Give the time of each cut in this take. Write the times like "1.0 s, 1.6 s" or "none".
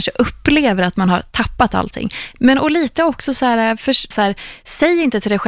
2.4 s, 4.1 s